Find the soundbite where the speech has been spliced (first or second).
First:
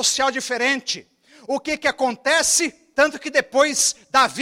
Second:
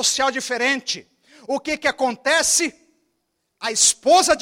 first